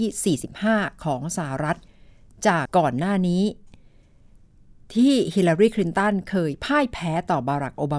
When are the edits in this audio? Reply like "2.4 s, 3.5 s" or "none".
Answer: 2.7 s